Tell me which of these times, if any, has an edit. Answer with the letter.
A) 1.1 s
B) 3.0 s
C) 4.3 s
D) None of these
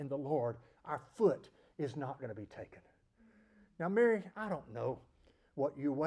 C